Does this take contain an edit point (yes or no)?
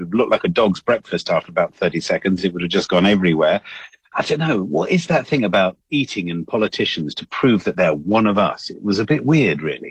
no